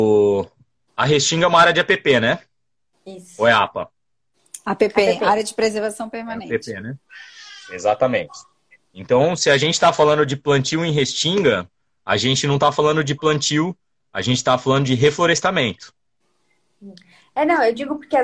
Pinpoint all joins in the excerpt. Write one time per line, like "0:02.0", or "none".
none

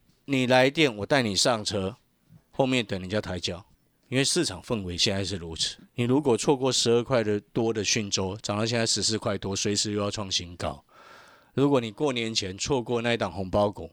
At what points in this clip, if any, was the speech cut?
none

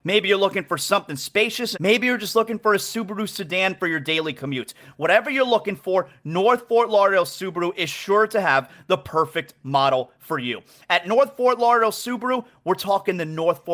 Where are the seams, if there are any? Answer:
0:01.7

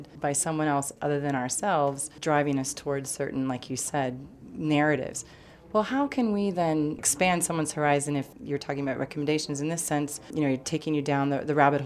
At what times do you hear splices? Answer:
none

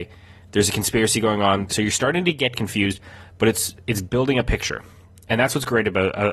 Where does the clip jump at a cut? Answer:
0:01.7

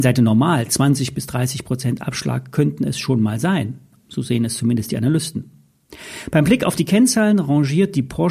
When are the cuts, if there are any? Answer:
0:04.0

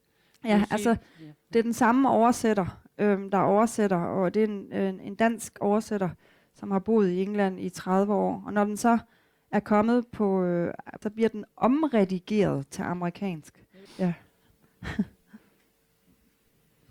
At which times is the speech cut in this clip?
0:11.0
0:13.9

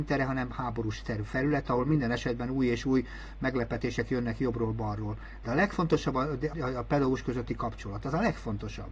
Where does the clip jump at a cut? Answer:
0:06.5

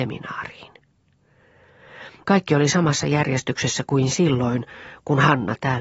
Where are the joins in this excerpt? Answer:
0:02.2

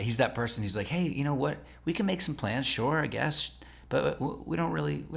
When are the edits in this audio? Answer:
none

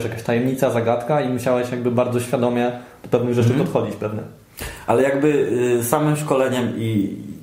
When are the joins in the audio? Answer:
none

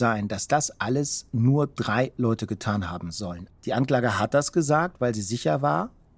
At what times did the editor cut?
0:03.6

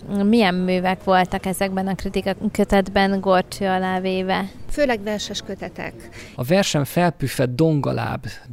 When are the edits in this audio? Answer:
0:06.3

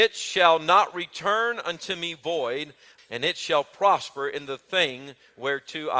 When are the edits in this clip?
0:03.0

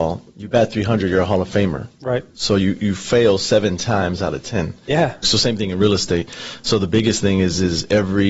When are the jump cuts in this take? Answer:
0:05.2

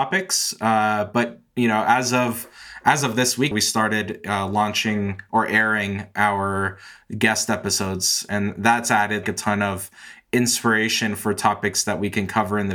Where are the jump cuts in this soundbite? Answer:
0:03.5
0:09.2

